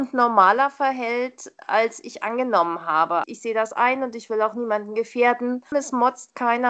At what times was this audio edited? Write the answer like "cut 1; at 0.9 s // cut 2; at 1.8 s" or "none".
cut 1; at 3.2 s // cut 2; at 5.7 s